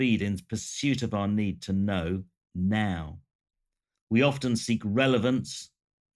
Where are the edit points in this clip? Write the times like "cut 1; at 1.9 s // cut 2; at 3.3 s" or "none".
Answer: cut 1; at 3.9 s